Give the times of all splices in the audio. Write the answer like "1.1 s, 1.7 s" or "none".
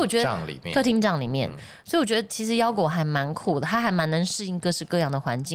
none